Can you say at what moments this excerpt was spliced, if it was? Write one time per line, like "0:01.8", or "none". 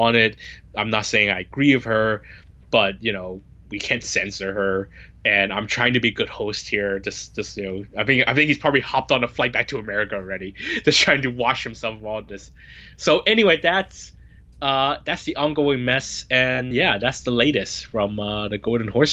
0:12.9
0:16.7